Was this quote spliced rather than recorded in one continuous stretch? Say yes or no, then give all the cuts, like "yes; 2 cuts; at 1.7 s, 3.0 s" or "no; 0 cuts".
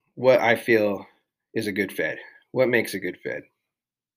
no; 0 cuts